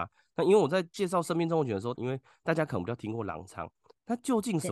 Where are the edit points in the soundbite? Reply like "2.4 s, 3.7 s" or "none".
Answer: 1.9 s